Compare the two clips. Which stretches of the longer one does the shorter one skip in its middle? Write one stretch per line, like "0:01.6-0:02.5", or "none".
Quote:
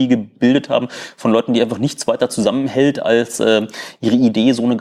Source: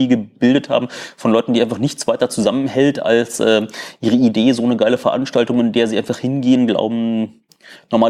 none